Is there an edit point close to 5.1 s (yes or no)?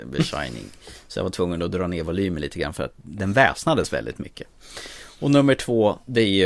no